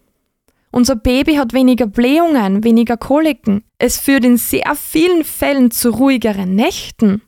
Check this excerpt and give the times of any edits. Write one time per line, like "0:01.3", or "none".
0:03.7